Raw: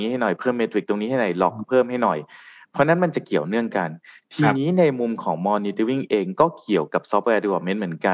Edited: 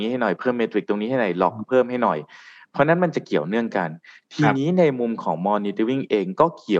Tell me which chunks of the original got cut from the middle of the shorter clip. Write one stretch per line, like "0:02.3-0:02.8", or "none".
none